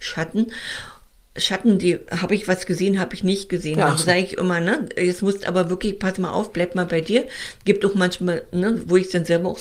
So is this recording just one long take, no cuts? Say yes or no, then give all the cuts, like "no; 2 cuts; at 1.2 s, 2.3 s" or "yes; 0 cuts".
yes; 0 cuts